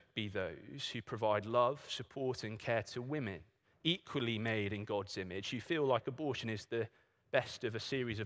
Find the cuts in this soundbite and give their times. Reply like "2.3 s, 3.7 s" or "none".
none

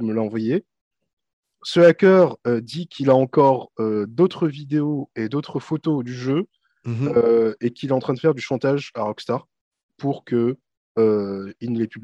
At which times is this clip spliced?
none

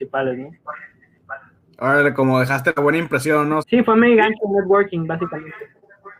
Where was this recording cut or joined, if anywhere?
3.6 s

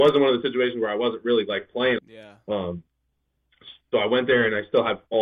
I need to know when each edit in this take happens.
2.0 s

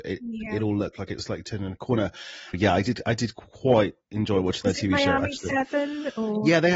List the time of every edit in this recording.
2.5 s

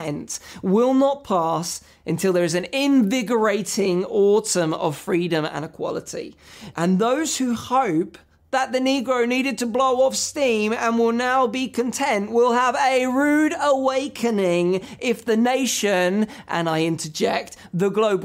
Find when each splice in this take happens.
6.7 s

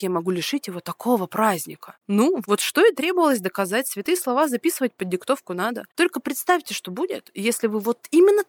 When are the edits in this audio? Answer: 2.4 s

